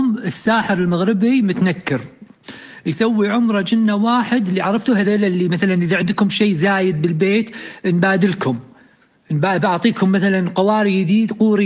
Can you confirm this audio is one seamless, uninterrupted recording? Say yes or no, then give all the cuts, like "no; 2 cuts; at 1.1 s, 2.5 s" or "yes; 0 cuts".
yes; 0 cuts